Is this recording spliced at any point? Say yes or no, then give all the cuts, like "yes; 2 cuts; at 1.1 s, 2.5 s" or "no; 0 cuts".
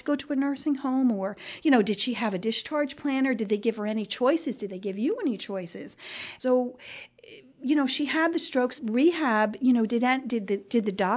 yes; 2 cuts; at 6.4 s, 8.8 s